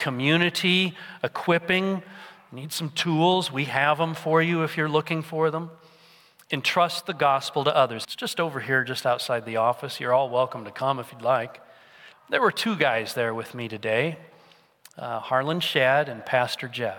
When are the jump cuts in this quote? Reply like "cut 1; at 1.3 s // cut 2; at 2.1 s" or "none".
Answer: cut 1; at 8.0 s // cut 2; at 12.1 s